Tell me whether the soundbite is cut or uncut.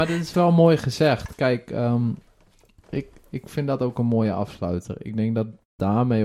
uncut